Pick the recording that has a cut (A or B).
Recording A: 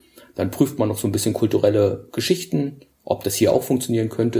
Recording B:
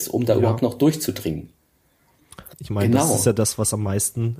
B